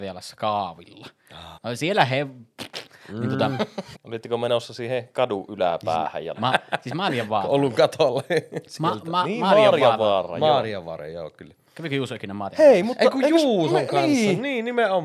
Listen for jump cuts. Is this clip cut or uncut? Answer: cut